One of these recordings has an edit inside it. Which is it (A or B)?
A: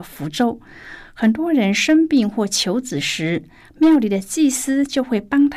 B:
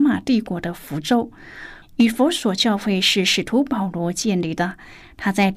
B